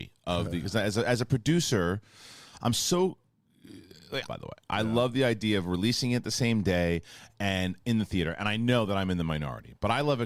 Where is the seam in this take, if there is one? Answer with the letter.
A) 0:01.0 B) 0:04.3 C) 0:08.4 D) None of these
B